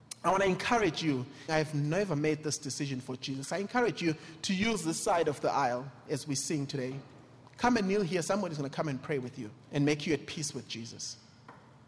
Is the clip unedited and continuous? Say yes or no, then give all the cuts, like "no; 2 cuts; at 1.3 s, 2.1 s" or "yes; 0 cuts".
no; 2 cuts; at 1.5 s, 9.6 s